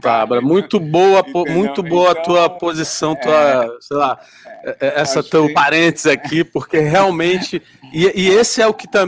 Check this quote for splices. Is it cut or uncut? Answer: uncut